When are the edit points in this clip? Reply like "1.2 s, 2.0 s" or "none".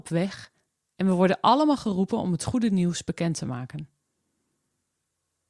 none